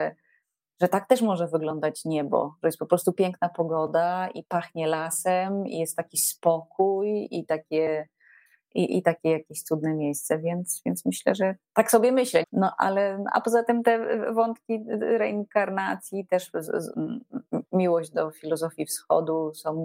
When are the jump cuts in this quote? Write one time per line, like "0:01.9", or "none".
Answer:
0:12.4
0:16.9